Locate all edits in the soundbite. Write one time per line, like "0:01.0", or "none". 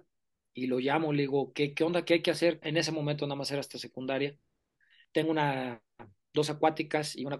0:02.6